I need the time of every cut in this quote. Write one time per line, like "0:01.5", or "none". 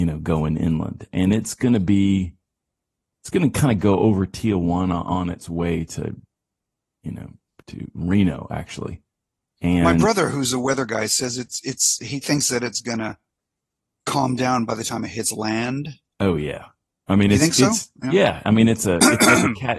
none